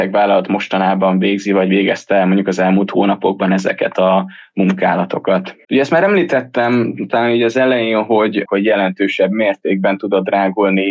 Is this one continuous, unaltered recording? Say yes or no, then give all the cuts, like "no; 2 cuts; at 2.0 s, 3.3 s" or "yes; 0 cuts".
no; 2 cuts; at 5.6 s, 8.5 s